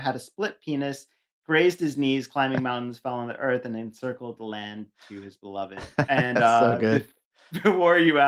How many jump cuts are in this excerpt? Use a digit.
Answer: 0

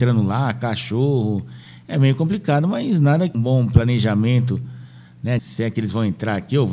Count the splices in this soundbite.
2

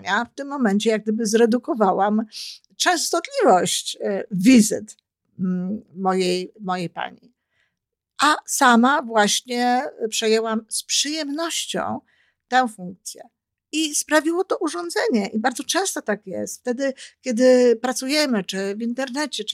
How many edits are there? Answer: 0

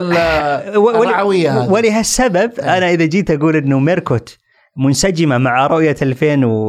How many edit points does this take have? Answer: 0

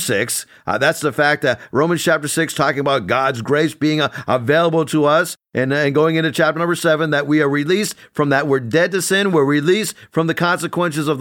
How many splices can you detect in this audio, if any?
0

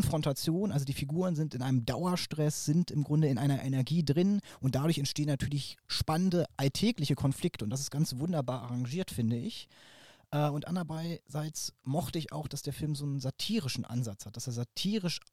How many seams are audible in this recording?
0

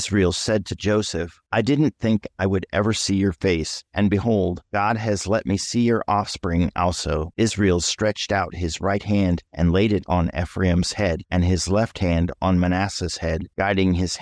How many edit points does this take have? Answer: 2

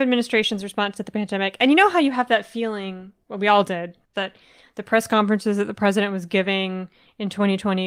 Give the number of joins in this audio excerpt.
1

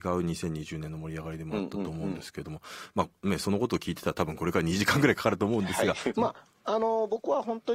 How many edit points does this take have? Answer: 1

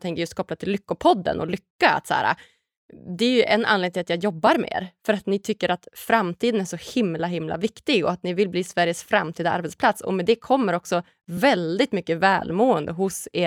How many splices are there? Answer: 0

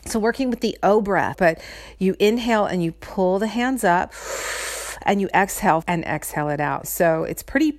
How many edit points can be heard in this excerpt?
3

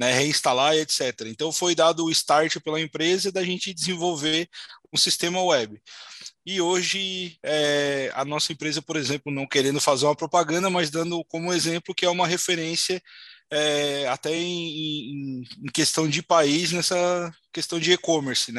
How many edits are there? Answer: 0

